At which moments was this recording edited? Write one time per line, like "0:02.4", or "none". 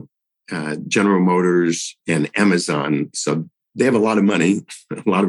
0:02.0
0:03.1